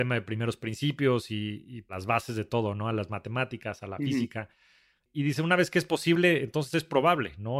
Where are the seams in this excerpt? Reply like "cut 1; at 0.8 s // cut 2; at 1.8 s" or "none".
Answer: none